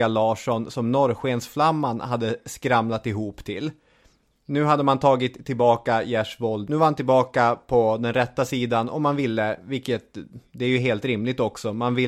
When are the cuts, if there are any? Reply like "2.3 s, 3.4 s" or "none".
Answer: none